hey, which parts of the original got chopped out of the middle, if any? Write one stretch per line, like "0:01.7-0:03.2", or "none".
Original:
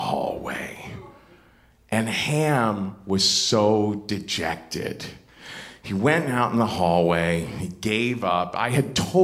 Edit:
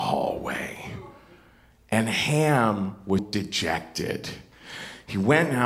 0:03.2-0:03.9